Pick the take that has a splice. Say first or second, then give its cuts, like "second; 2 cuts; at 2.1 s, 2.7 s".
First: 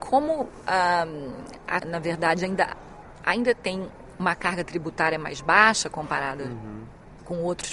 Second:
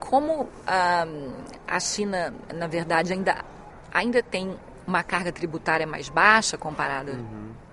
first; 1 cut; at 1.8 s